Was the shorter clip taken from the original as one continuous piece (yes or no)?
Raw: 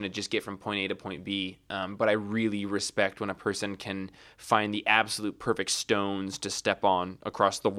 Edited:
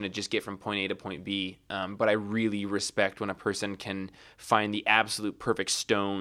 yes